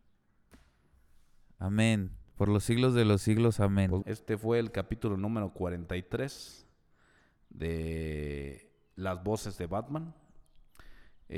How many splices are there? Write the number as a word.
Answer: one